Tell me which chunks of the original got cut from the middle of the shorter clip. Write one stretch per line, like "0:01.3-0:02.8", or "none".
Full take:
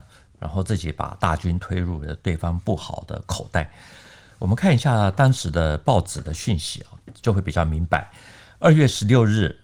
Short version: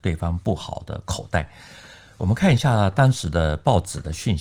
none